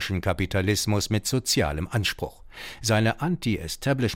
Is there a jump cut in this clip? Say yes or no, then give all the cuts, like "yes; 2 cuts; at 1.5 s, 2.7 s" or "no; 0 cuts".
no; 0 cuts